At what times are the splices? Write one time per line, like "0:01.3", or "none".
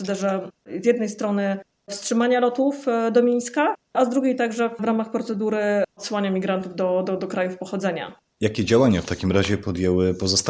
none